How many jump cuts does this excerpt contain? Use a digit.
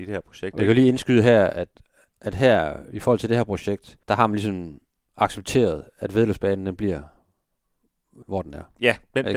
2